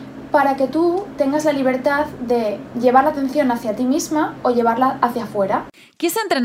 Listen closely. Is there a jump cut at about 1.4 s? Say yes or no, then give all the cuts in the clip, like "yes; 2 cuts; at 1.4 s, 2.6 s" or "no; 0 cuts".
no; 1 cut; at 2.7 s